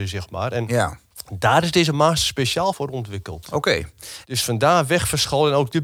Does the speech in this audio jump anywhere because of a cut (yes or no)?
yes